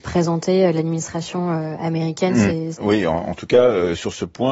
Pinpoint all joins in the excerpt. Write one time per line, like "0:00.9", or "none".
0:02.7